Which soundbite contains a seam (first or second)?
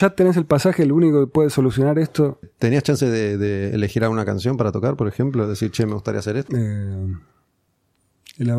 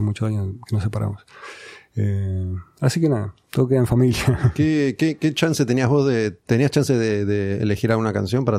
first